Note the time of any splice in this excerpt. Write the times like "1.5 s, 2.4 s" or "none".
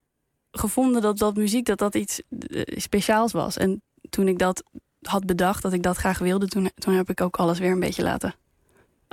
none

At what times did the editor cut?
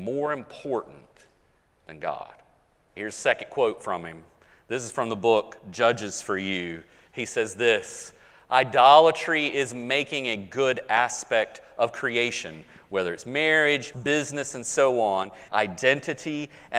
3.0 s, 13.9 s, 15.5 s

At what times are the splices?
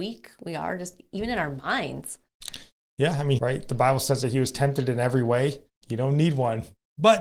3.4 s, 5.7 s

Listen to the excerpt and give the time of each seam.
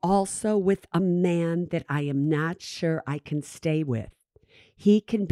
none

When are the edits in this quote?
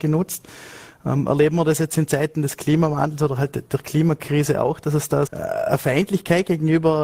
5.3 s

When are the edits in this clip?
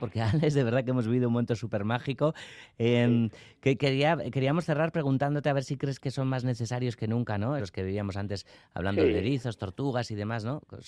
7.6 s

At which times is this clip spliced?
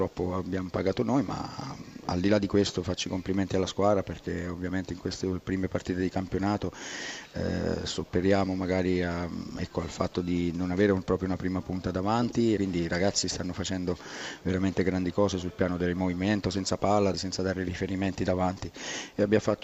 12.6 s, 17.1 s

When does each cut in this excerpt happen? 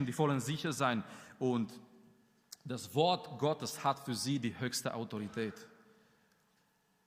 none

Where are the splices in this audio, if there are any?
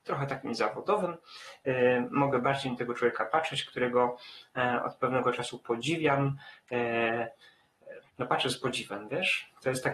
8.1 s

